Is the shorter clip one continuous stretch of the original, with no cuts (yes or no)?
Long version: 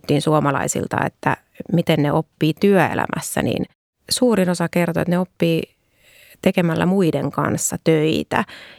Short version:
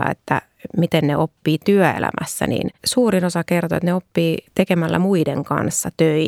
no